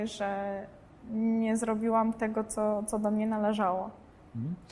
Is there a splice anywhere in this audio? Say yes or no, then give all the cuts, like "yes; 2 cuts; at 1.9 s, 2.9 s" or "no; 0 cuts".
no; 0 cuts